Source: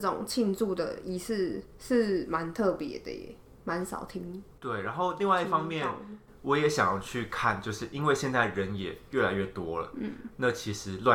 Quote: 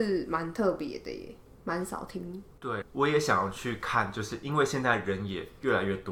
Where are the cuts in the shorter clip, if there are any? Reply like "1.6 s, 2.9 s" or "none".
2.8 s